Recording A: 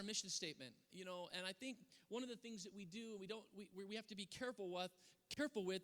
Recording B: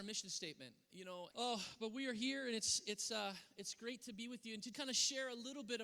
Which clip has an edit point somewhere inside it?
B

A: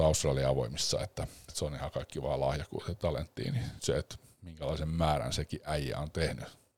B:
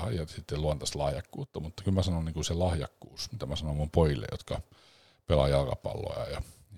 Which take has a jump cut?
A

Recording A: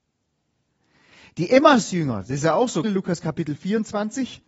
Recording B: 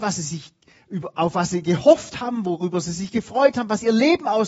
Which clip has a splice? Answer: A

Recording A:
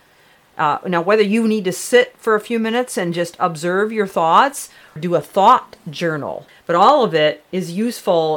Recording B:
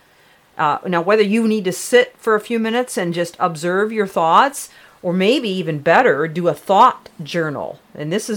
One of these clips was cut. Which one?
A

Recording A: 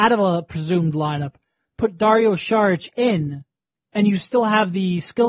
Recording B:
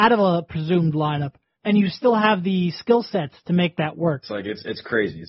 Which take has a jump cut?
B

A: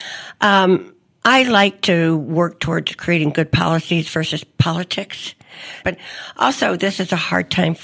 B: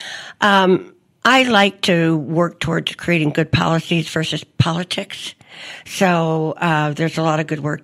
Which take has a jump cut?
A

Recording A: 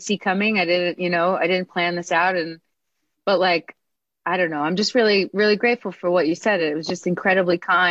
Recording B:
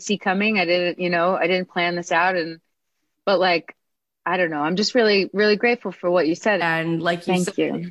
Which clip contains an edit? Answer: B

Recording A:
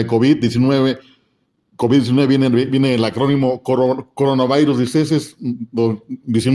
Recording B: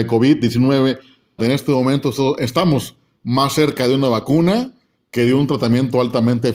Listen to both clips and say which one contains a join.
B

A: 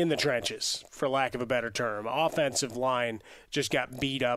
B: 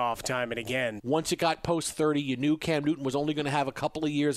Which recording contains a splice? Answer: B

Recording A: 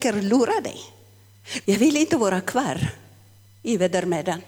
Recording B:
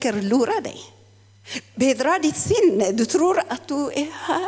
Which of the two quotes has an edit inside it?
A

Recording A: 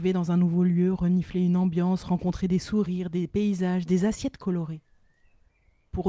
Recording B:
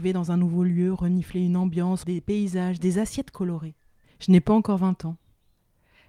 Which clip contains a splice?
B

